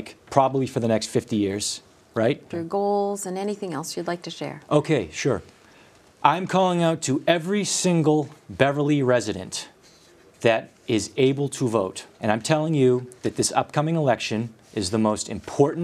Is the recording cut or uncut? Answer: cut